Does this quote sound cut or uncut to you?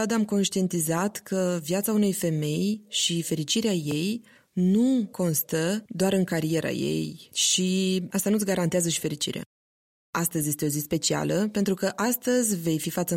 cut